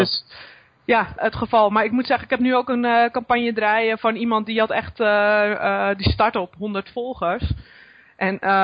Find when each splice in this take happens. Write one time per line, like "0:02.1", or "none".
0:01.2